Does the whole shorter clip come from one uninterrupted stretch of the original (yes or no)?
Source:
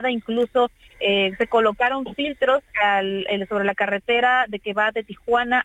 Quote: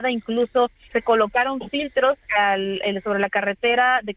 no